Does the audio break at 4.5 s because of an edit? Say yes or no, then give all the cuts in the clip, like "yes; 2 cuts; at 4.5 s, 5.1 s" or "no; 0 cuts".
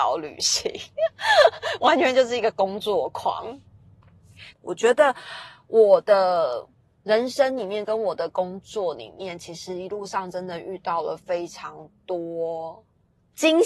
yes; 1 cut; at 4.5 s